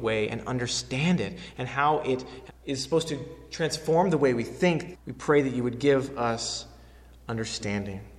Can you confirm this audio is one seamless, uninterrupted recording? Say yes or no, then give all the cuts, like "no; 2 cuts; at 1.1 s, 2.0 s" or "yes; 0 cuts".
no; 2 cuts; at 2.5 s, 4.9 s